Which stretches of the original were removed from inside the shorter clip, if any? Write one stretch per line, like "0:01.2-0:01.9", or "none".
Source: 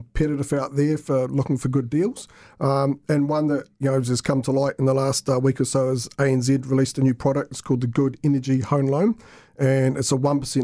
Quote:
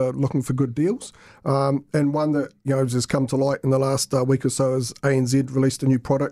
none